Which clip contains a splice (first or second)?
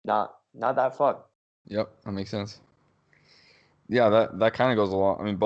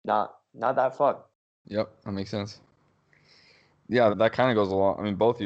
second